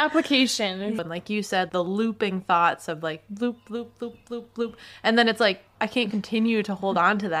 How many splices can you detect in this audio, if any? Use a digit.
1